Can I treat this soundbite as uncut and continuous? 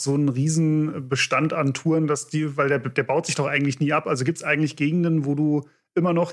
yes; 0 cuts

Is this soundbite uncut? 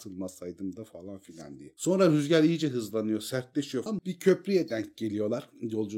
no; 1 cut; at 3.9 s

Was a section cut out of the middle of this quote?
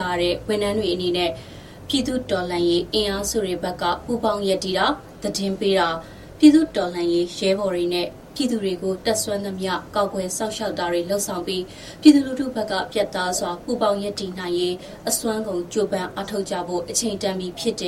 no; 0 cuts

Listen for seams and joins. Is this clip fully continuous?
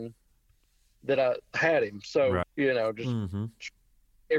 no; 1 cut; at 2.4 s

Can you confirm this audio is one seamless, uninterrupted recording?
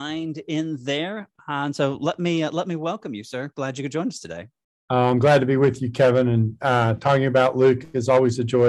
yes; 0 cuts

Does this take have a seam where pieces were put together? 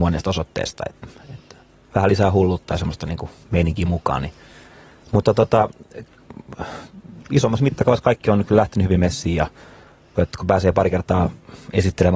yes; 1 cut; at 10.2 s

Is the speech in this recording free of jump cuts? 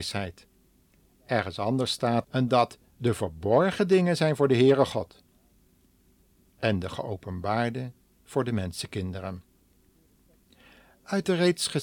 no; 1 cut; at 2.2 s

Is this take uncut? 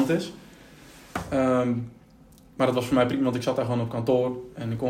yes; 0 cuts

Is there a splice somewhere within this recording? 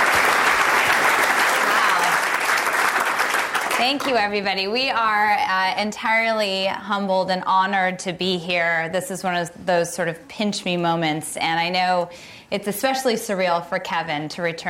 no; 0 cuts

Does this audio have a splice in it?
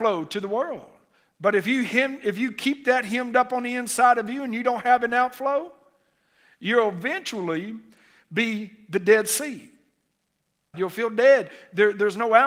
yes; 1 cut; at 10.7 s

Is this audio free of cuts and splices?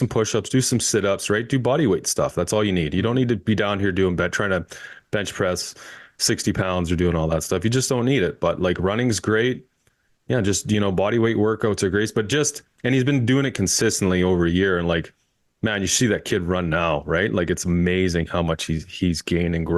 yes; 0 cuts

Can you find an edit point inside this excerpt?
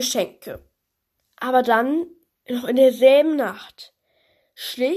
yes; 1 cut; at 1.2 s

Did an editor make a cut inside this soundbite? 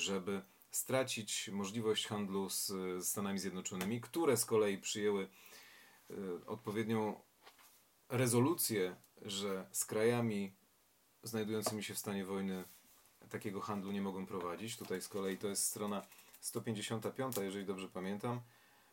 no; 0 cuts

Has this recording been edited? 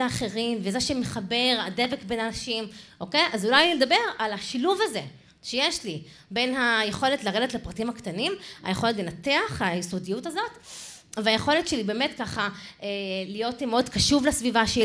no; 0 cuts

